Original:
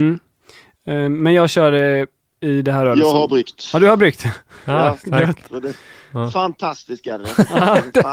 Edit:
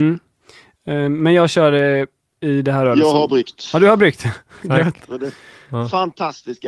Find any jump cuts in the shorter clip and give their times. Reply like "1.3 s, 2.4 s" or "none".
4.6 s